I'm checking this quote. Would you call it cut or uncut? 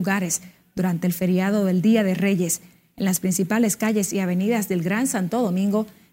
uncut